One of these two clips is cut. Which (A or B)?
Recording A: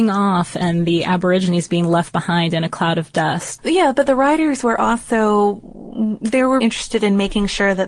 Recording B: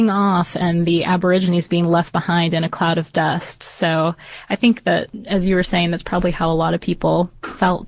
A